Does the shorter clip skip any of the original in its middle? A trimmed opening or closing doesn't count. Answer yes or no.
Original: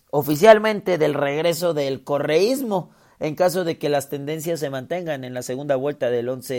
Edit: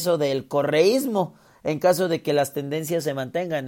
no